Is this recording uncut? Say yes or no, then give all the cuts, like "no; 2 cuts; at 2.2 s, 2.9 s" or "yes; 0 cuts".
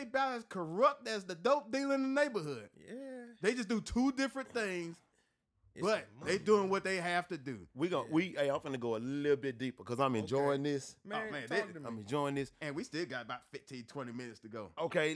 yes; 0 cuts